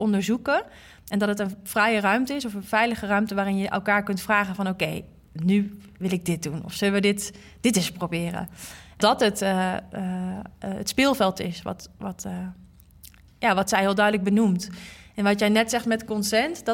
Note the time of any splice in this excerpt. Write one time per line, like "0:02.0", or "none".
0:09.0